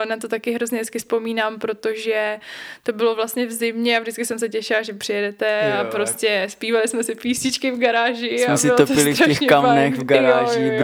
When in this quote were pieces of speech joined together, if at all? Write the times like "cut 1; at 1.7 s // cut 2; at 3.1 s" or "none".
none